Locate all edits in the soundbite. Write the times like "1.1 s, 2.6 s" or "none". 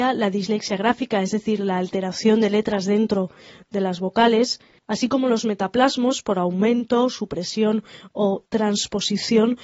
none